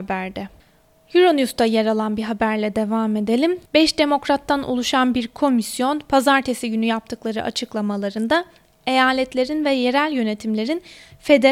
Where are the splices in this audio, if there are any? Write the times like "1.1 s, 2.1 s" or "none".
3.7 s